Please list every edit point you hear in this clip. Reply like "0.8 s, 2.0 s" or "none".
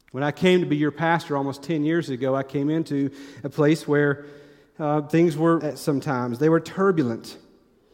5.6 s